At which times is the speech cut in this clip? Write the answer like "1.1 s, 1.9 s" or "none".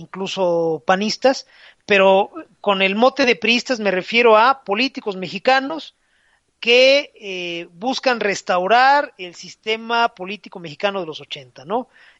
none